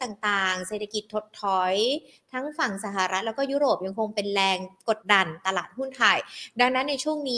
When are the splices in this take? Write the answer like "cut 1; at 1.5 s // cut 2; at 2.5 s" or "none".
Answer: cut 1; at 5.0 s

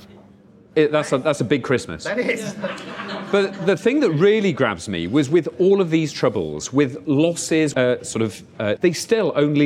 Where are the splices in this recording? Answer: cut 1; at 7.7 s // cut 2; at 8.8 s

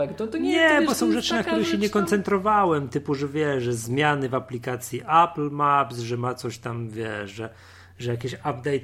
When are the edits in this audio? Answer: none

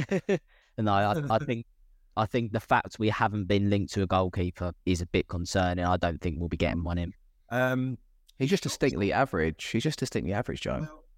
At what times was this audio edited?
cut 1; at 4.8 s // cut 2; at 7.4 s

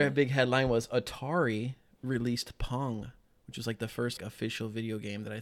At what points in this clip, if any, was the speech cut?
cut 1; at 4.2 s

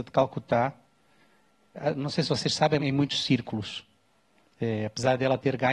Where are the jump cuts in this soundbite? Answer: cut 1; at 2.8 s

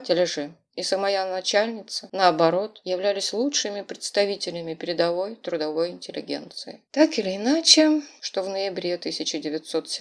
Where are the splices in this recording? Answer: cut 1; at 6.9 s // cut 2; at 8.2 s

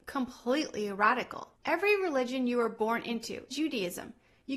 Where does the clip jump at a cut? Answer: cut 1; at 1.6 s // cut 2; at 3.5 s

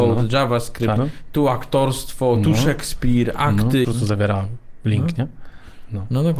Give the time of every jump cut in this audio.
cut 1; at 1.0 s // cut 2; at 3.8 s

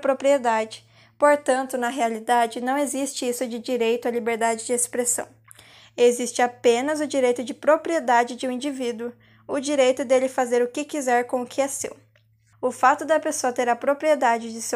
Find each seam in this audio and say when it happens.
cut 1; at 12.5 s

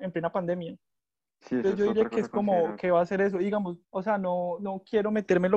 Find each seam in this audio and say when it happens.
cut 1; at 3.8 s

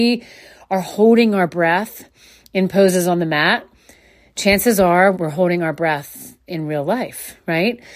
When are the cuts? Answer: cut 1; at 5.1 s

